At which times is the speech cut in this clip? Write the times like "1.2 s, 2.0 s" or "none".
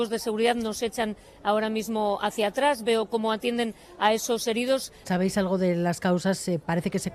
5.0 s